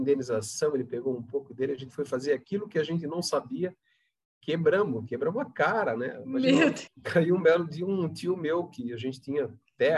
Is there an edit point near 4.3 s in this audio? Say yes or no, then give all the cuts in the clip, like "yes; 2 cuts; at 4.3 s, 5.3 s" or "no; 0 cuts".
no; 1 cut; at 6.9 s